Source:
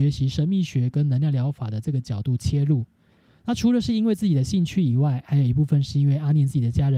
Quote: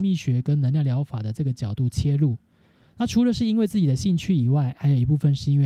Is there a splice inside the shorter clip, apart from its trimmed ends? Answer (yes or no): no